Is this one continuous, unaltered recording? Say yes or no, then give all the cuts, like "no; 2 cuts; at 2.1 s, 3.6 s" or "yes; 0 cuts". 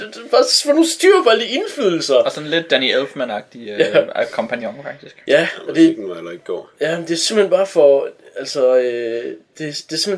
yes; 0 cuts